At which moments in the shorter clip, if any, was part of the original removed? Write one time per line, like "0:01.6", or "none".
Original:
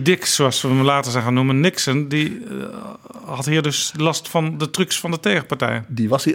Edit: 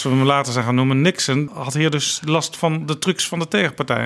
0:01.5